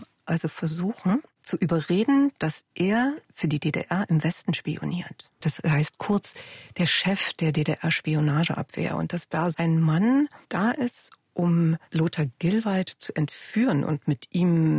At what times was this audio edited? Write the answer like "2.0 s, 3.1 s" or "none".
5.4 s, 9.5 s